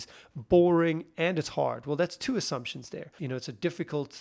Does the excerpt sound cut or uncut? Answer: cut